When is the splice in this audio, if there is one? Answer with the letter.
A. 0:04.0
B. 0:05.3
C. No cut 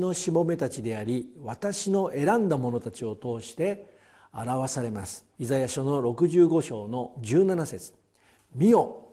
B